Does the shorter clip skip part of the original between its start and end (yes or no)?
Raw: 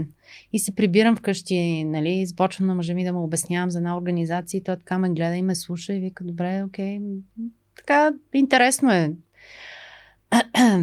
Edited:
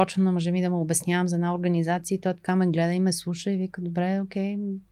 no